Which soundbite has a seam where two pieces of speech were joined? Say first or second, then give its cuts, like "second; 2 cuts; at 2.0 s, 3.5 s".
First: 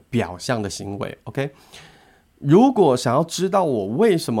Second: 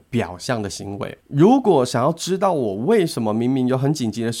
second; 1 cut; at 1.2 s